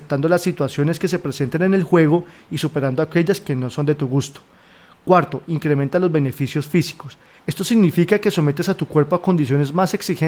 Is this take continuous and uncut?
no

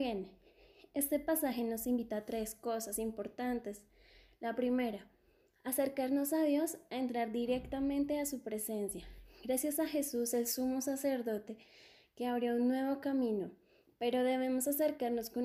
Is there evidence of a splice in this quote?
no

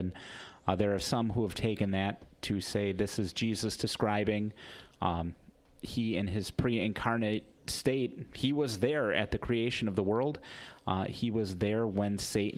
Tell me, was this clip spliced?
no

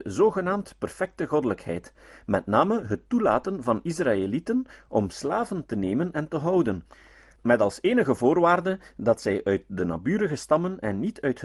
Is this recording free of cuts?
yes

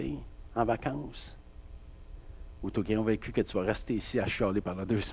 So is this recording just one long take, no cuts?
yes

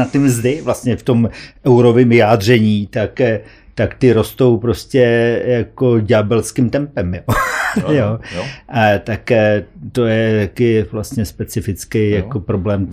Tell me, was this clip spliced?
no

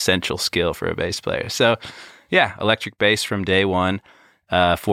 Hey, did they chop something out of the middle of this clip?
no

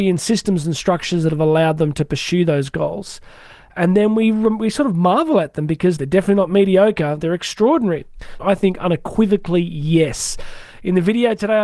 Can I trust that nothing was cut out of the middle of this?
no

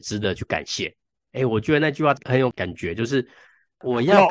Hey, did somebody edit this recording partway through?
yes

